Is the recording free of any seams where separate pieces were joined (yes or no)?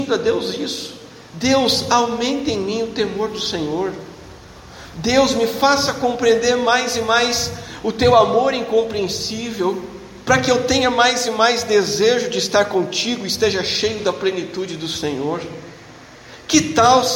yes